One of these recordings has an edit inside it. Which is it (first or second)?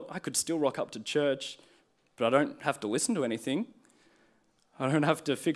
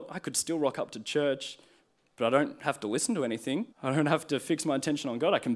second